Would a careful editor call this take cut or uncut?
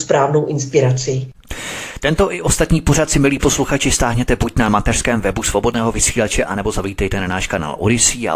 uncut